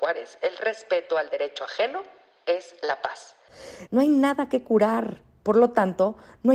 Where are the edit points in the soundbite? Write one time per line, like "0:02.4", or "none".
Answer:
0:03.9